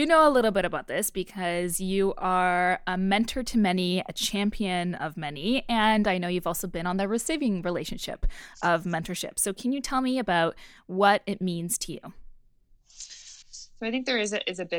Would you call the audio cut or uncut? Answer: cut